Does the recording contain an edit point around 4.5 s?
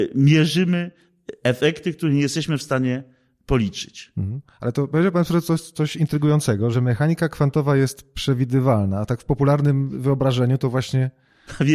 no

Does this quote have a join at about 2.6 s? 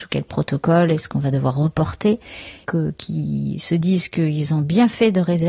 yes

